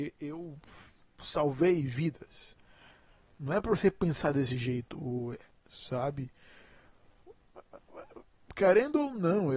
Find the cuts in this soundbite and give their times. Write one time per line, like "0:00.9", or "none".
0:05.5

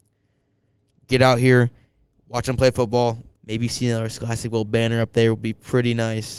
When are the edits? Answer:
0:03.3

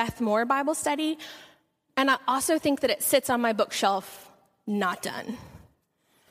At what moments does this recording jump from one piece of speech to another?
none

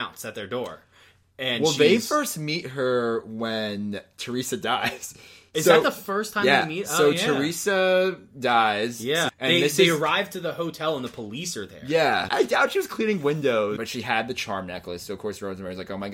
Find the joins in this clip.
0:09.3
0:12.3
0:13.8

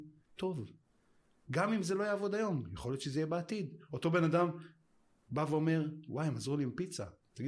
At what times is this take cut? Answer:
none

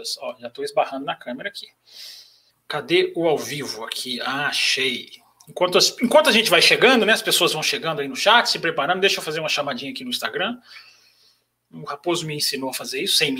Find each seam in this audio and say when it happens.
0:02.5

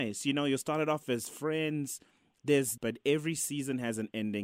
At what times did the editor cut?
0:02.8

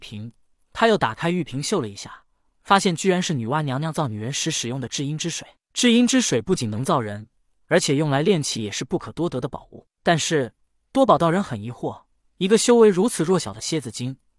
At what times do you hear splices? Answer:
none

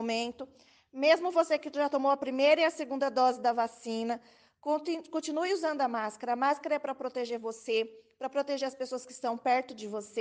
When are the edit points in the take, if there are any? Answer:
none

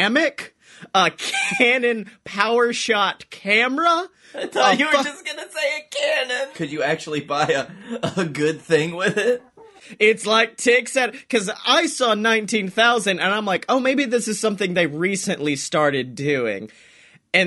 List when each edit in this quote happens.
0:06.5

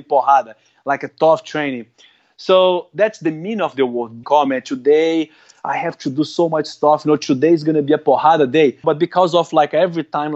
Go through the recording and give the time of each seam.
0:04.2
0:08.8

